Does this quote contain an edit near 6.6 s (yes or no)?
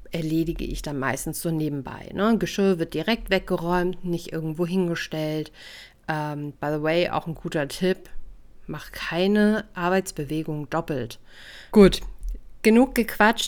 yes